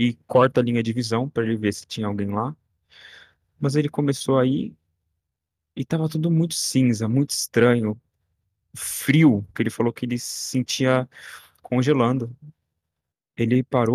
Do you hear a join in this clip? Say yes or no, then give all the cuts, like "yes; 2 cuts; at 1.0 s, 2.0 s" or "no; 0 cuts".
yes; 1 cut; at 9.5 s